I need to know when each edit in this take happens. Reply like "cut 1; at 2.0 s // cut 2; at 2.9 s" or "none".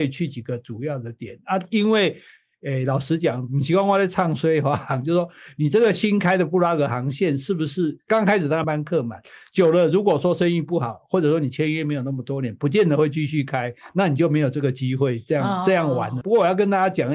cut 1; at 8.6 s // cut 2; at 16.2 s